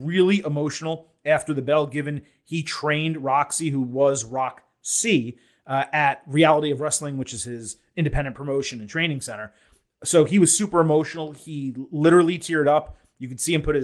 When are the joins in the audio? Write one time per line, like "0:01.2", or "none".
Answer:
none